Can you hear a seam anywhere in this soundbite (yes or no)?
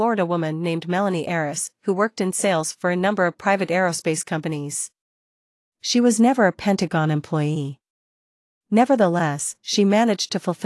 no